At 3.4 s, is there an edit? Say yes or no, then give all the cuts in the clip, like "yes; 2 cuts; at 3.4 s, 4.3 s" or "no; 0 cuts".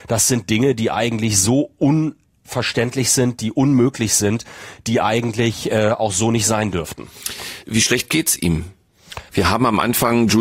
no; 2 cuts; at 7.6 s, 9.3 s